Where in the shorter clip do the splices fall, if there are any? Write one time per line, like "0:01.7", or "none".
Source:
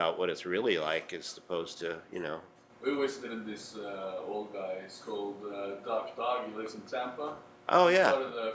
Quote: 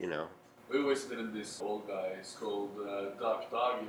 0:01.6